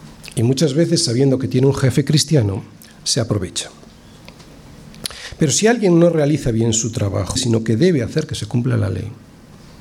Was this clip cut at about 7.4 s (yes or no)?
yes